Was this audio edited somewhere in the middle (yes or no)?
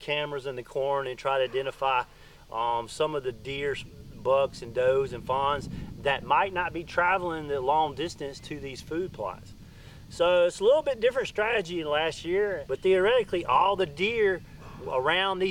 yes